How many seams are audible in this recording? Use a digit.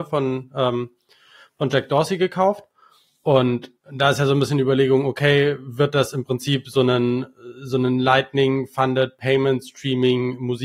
1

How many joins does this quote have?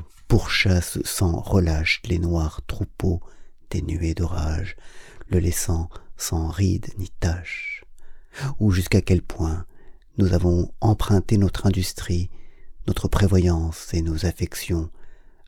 0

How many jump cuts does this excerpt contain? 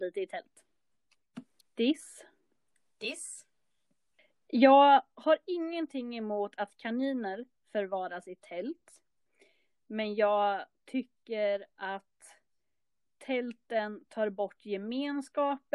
1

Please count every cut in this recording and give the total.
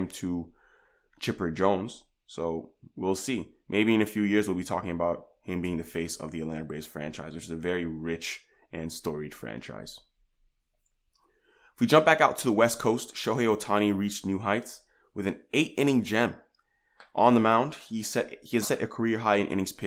1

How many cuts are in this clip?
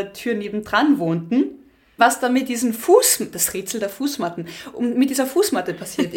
1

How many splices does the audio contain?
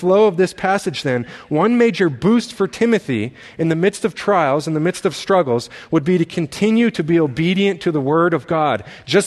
0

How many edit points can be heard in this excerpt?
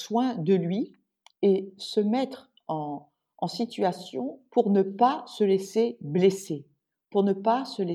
0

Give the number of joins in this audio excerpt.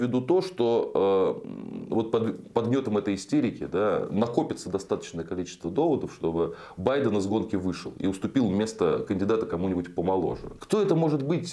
1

